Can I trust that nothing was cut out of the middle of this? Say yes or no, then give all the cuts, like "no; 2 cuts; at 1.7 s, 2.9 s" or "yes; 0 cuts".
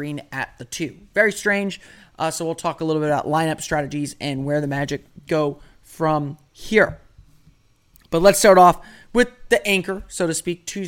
yes; 0 cuts